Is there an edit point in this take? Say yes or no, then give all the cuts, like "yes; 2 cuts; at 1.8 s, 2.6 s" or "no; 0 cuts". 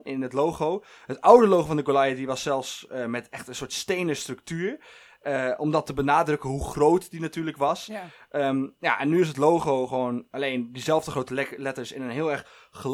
no; 0 cuts